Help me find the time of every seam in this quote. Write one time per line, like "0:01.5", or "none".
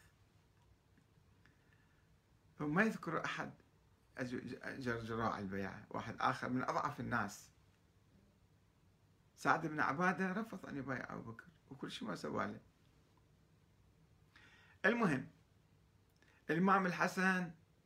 none